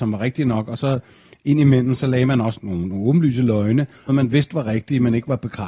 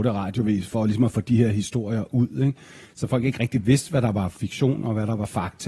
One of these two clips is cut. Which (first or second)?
first